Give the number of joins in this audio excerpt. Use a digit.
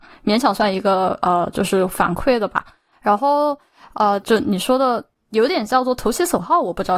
2